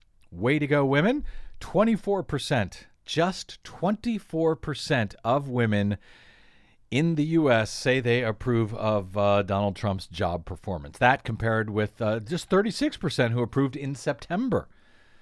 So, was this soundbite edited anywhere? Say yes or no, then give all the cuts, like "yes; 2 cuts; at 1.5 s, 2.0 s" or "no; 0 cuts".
no; 0 cuts